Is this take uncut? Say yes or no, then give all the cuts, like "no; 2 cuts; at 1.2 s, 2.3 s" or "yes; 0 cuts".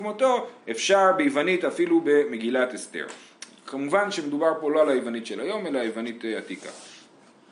yes; 0 cuts